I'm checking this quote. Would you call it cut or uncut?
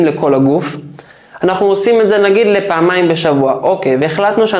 cut